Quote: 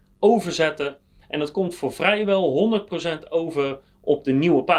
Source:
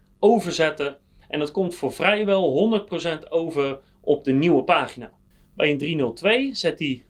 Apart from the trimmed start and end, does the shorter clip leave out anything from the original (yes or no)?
no